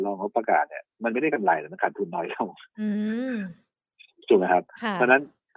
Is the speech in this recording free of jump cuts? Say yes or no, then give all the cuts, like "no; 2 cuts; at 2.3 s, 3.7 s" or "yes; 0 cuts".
no; 1 cut; at 0.9 s